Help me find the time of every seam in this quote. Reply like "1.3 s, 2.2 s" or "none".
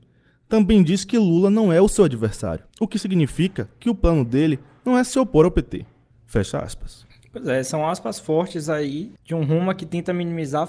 6.1 s, 9.2 s